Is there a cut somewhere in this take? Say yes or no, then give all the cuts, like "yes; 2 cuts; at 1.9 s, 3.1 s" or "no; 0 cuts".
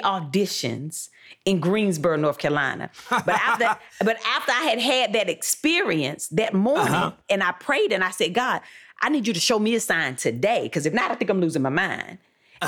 no; 0 cuts